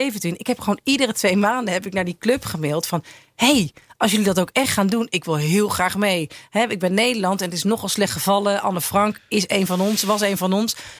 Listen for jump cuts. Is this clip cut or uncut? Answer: uncut